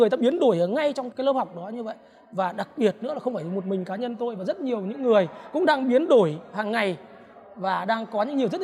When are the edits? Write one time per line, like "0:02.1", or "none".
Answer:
0:01.1